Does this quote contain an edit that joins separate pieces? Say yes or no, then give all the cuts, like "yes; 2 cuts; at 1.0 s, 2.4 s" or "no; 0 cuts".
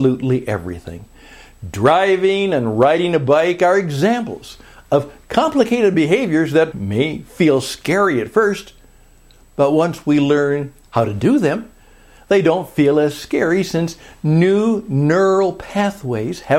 yes; 1 cut; at 6.7 s